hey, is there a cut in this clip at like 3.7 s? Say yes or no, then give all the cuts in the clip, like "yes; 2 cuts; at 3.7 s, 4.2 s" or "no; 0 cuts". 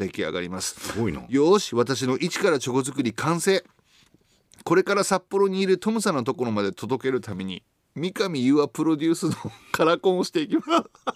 no; 0 cuts